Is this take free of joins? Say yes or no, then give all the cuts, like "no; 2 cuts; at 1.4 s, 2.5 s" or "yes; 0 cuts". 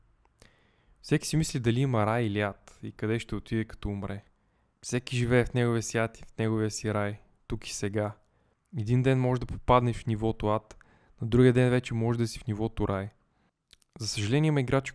no; 1 cut; at 4.7 s